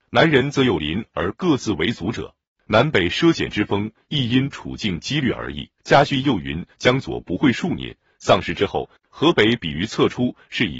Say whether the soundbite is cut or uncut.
cut